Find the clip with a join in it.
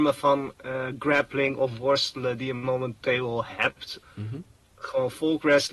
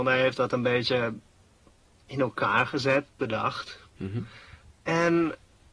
first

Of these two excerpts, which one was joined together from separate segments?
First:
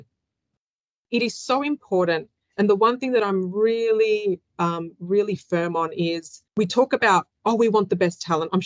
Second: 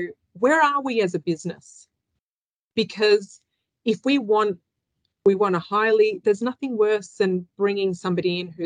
first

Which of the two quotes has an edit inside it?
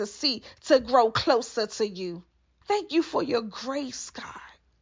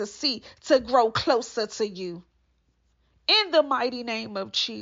first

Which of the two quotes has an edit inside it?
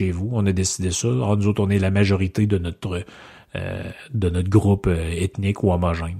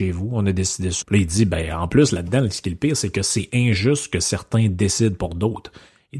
second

